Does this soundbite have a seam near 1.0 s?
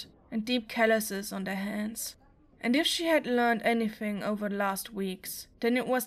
no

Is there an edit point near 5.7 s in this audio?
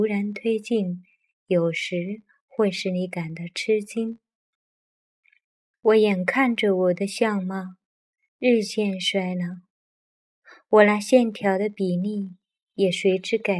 yes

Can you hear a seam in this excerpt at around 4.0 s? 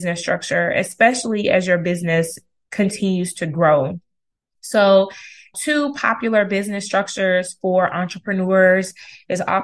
no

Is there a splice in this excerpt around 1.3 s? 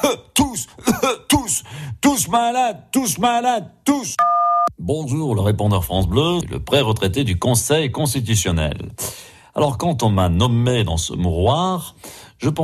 no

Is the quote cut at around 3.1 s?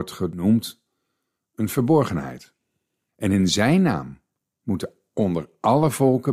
yes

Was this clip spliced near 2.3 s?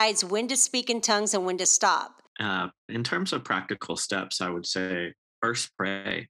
yes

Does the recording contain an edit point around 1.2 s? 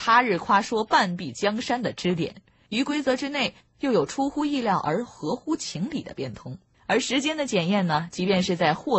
no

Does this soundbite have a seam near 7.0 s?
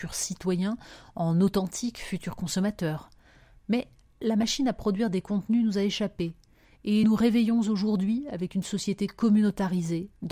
yes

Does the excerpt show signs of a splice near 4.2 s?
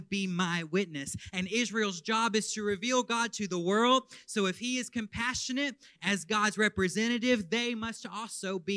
no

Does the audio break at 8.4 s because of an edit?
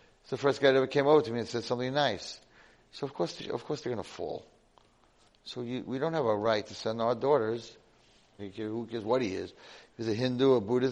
yes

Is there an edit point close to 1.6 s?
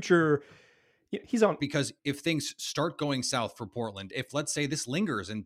yes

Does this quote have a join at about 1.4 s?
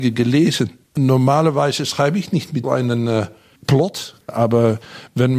no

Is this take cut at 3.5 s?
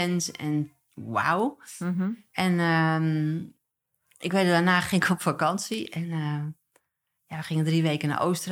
no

